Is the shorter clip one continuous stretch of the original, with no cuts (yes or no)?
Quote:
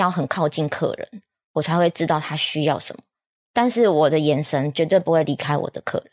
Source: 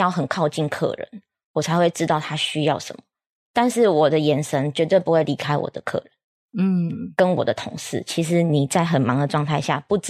yes